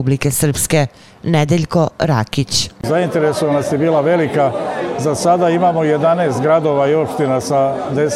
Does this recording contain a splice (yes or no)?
no